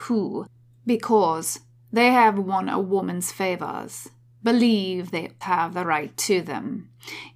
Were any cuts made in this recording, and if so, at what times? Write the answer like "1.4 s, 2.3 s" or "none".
5.4 s